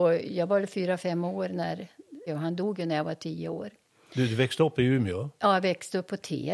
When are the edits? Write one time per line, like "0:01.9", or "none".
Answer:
0:02.3